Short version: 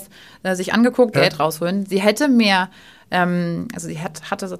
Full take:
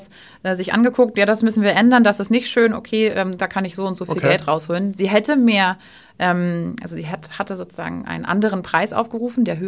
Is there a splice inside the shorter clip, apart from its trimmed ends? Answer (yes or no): yes